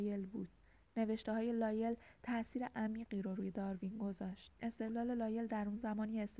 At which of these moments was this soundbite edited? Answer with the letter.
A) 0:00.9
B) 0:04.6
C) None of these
B